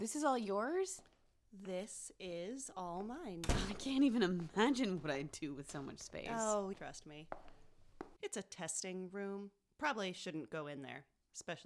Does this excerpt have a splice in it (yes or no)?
yes